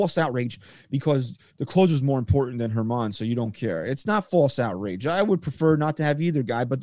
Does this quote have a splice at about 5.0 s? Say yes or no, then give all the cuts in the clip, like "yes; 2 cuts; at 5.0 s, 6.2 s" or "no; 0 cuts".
no; 1 cut; at 1.5 s